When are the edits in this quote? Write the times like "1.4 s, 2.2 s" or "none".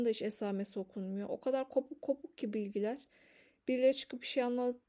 none